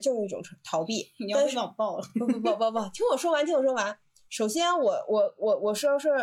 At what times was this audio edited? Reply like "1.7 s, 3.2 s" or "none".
none